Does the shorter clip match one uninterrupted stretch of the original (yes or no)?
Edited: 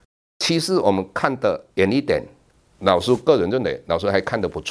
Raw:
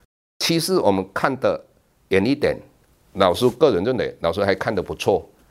no